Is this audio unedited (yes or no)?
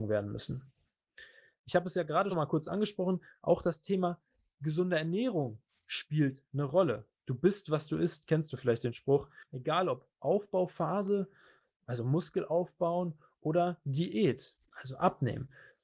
no